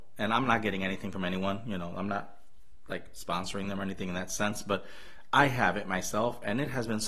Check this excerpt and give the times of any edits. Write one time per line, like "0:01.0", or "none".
none